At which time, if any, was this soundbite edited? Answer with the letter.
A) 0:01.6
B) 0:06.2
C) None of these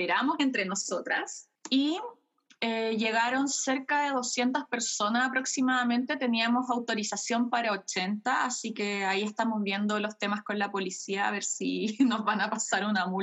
A